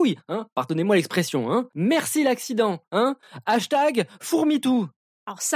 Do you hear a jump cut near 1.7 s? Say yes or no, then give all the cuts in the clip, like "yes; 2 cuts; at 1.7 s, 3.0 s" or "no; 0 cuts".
yes; 1 cut; at 1.7 s